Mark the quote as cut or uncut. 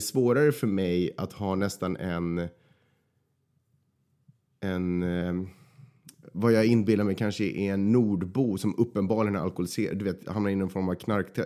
uncut